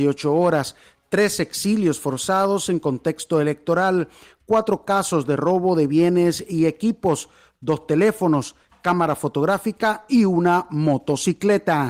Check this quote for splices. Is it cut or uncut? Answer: uncut